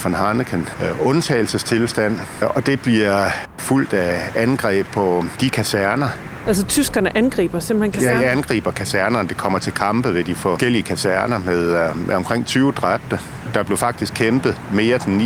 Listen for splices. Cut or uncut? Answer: uncut